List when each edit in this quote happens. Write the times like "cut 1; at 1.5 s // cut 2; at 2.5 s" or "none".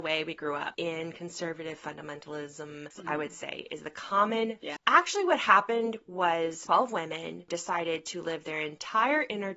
cut 1; at 2.9 s // cut 2; at 4.8 s

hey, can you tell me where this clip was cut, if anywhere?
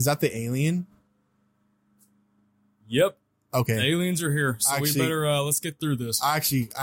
none

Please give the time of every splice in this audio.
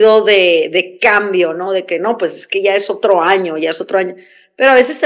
none

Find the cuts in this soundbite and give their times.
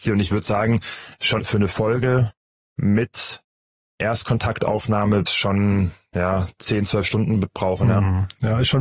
cut 1; at 1.4 s // cut 2; at 5.3 s

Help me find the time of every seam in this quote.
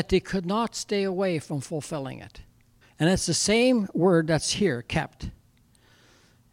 cut 1; at 2.8 s

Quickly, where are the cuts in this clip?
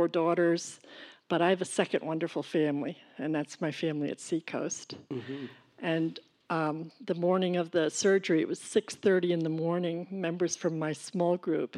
cut 1; at 1.2 s

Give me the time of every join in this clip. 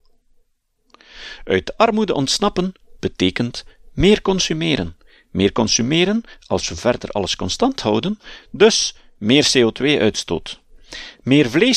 cut 1; at 8.4 s

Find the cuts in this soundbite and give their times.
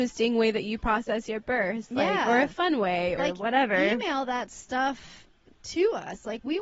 cut 1; at 3.2 s

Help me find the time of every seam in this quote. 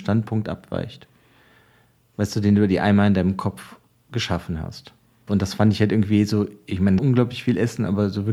cut 1; at 5.3 s // cut 2; at 7.0 s

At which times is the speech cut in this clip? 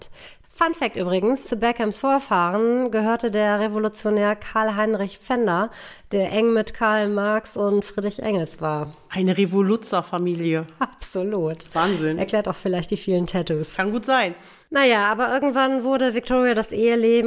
cut 1; at 1.4 s

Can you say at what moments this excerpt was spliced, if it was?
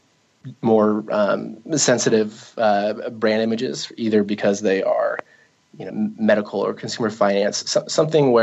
cut 1; at 5.9 s

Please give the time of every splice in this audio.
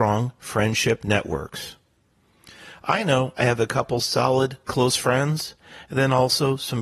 cut 1; at 4.7 s

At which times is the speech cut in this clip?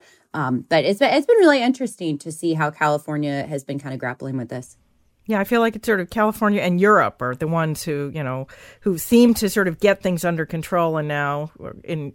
none

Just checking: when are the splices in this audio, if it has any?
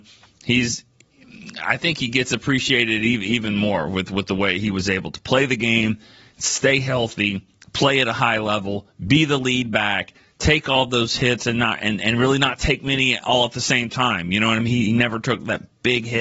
none

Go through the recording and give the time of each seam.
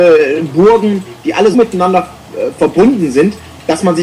cut 1; at 1.5 s

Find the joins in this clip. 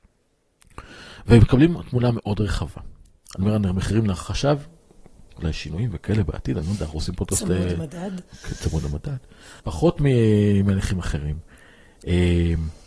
cut 1; at 9.6 s

